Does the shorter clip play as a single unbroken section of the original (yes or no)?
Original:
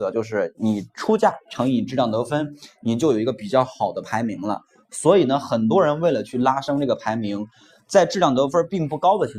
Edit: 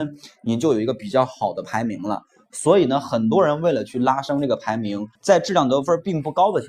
no